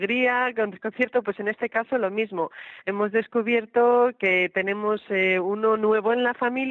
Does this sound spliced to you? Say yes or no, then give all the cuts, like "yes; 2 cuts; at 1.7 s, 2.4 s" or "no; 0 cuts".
no; 0 cuts